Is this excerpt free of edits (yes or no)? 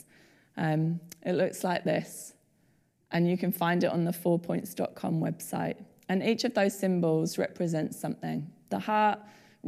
yes